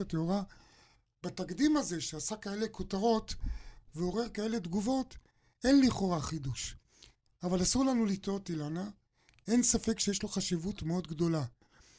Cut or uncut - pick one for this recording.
uncut